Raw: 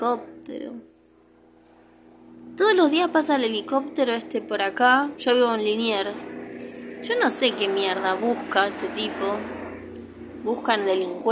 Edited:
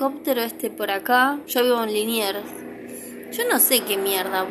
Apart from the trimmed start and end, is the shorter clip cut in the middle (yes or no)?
no